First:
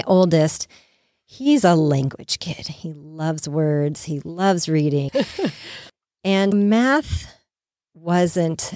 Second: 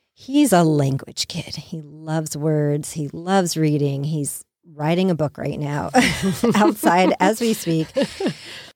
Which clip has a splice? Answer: first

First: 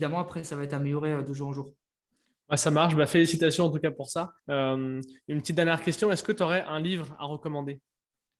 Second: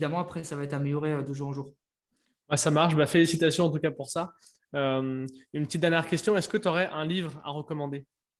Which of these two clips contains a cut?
first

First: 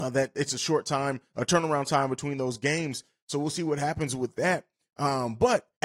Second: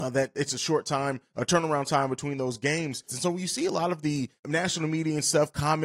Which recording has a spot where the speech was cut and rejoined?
second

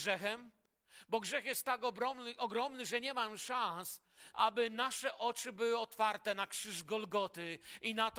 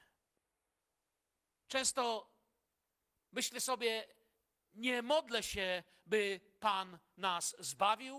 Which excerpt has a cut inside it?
first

